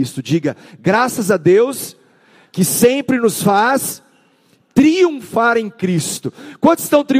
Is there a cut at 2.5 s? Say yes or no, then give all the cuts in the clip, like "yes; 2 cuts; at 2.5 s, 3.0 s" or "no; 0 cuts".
no; 0 cuts